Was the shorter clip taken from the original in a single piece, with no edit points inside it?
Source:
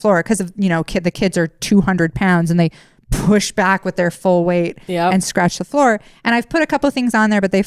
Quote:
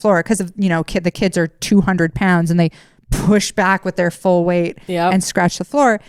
yes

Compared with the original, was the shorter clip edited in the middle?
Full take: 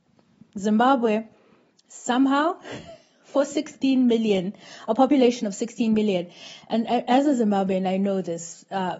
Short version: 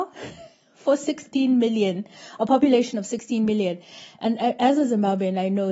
no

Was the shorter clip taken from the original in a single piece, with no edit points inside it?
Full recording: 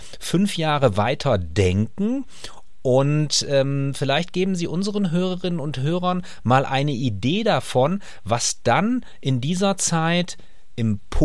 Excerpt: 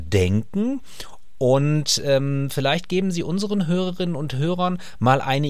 yes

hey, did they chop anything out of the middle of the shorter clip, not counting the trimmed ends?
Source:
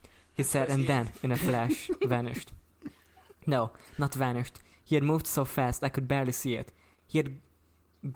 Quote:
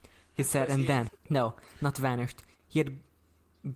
yes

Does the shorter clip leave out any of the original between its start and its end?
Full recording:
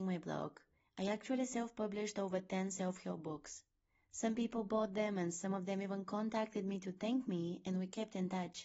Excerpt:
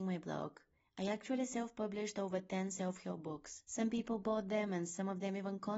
yes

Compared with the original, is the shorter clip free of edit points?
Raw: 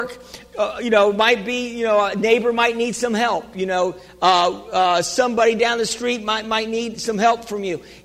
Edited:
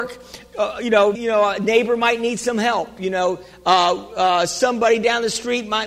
no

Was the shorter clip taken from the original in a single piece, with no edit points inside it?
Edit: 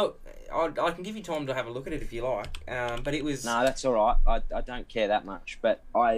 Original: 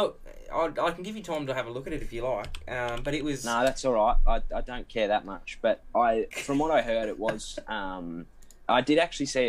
yes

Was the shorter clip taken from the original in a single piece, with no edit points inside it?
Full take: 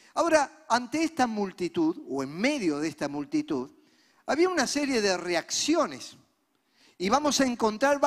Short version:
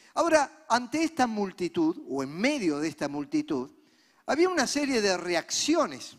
yes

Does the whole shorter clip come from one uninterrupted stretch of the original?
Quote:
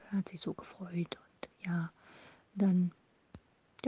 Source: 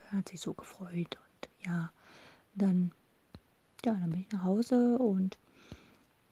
yes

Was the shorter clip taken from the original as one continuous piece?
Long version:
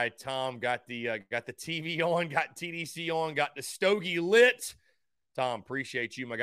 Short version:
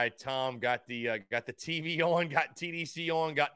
yes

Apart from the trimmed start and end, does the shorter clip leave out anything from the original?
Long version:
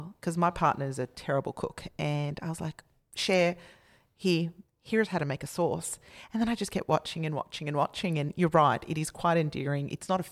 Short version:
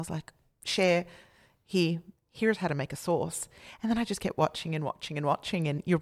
no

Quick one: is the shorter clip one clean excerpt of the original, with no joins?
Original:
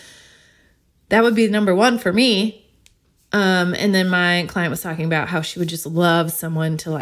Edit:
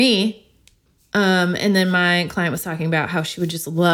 yes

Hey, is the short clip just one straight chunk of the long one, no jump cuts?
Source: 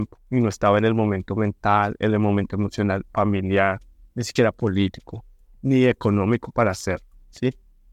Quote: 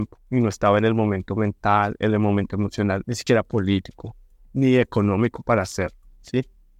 no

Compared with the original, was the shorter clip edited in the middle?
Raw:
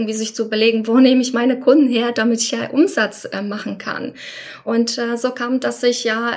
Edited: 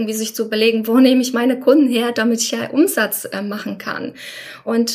no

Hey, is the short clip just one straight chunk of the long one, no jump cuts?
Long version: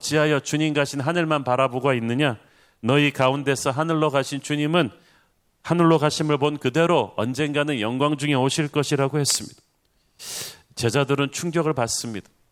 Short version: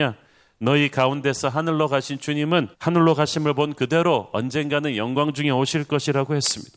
no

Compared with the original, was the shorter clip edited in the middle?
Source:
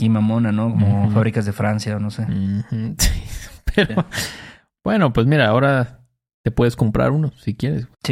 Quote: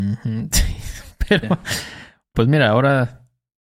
yes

